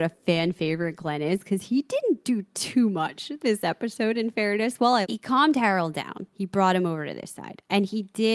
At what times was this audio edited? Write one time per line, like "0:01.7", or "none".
0:05.0
0:06.3